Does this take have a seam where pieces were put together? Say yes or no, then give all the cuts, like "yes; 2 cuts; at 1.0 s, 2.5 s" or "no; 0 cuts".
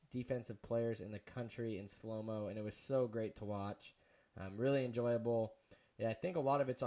no; 0 cuts